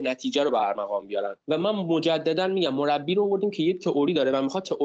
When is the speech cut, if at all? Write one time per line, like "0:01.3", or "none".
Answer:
0:01.4